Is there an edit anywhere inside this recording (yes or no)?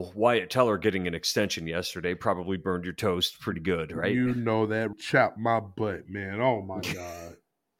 yes